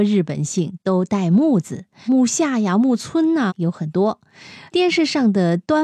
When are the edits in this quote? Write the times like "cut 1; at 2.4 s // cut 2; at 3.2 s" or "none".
cut 1; at 2.1 s // cut 2; at 3.5 s // cut 3; at 4.7 s